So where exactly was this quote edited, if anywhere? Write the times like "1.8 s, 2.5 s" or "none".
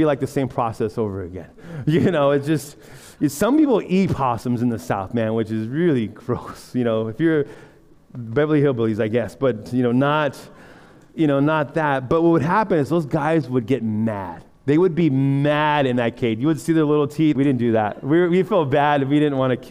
17.3 s